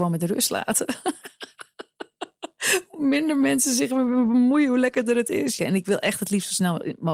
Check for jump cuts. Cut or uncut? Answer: cut